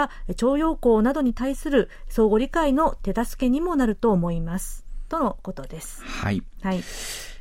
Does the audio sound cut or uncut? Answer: uncut